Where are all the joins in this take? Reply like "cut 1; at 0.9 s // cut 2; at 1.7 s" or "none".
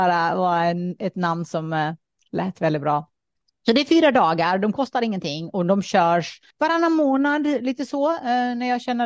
cut 1; at 6.5 s